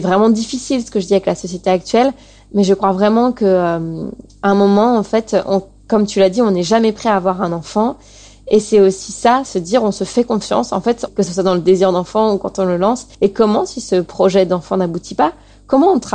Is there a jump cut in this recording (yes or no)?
yes